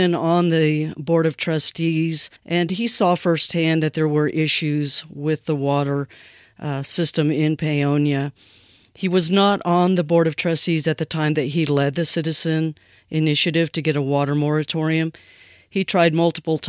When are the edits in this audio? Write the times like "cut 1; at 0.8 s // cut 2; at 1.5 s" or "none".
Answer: cut 1; at 2.4 s